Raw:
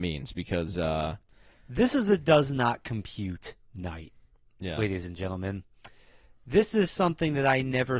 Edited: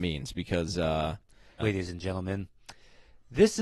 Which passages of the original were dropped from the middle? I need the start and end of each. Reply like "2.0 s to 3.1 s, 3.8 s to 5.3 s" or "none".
1.6 s to 4.8 s